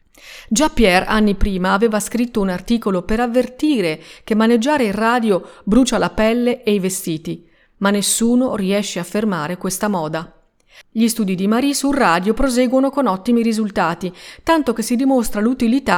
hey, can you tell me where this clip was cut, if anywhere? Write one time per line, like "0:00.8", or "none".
0:10.8